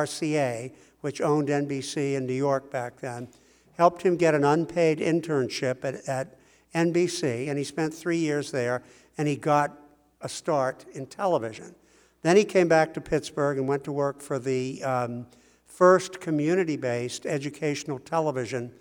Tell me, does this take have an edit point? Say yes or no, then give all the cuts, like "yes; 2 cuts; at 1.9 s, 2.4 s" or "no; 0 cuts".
no; 0 cuts